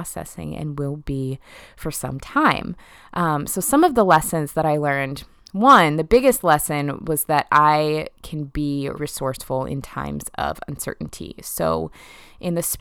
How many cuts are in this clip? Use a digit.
1